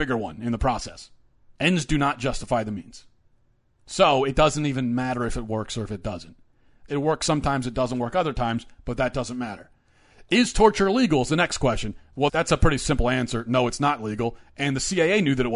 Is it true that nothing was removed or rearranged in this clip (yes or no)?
no